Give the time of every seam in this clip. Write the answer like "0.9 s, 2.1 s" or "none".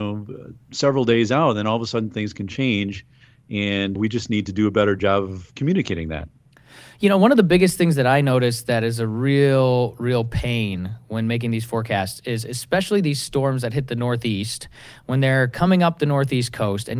4.0 s